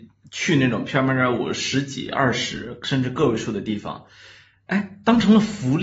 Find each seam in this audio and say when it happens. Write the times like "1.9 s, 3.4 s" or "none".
none